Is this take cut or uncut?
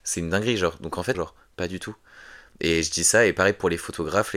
cut